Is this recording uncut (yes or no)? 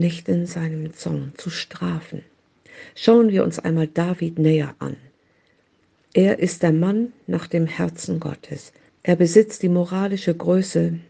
no